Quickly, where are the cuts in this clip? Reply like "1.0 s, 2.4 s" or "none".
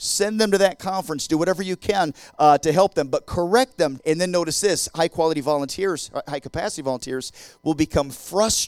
4.0 s